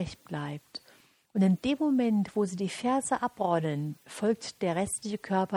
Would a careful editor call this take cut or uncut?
uncut